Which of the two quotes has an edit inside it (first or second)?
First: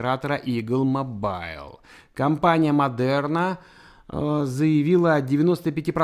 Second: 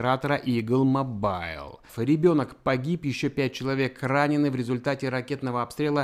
second